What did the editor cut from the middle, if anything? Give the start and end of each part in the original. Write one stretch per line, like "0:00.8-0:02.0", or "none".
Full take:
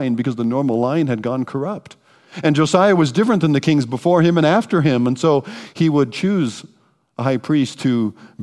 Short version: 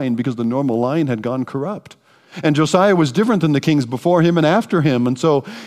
none